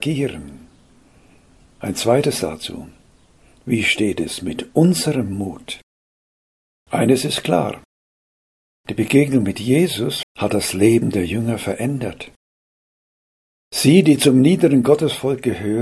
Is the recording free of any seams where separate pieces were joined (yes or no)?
no